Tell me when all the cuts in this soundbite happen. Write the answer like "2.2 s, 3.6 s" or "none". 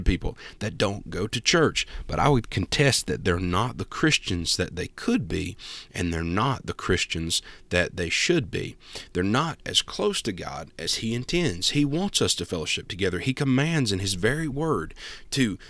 none